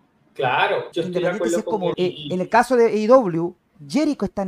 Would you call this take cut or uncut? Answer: cut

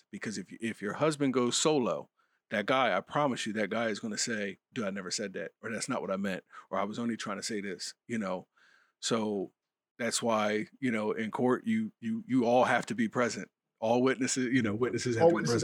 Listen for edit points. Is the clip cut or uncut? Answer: uncut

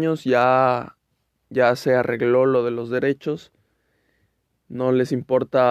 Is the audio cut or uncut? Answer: cut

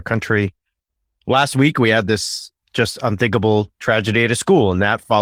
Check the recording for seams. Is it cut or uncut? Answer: uncut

